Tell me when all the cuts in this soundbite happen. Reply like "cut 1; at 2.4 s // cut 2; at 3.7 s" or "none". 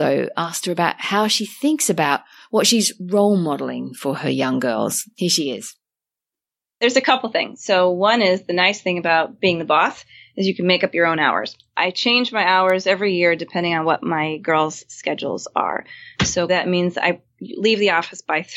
cut 1; at 16.5 s